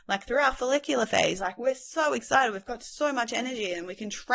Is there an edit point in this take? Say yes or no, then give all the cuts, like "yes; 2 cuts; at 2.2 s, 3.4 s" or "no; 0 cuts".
no; 0 cuts